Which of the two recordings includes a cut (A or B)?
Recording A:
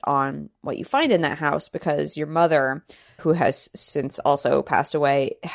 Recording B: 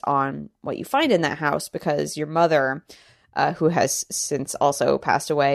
A